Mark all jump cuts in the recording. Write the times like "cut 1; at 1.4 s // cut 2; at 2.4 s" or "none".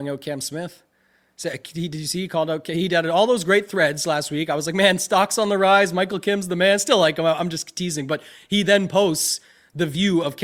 none